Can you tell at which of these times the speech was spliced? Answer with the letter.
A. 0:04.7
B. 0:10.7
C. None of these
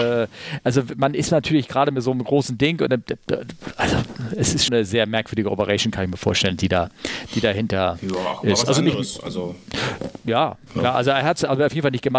A